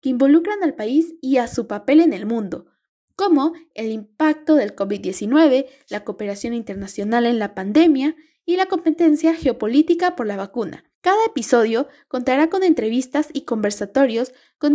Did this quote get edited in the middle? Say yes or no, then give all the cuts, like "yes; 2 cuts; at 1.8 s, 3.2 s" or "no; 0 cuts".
yes; 1 cut; at 10.9 s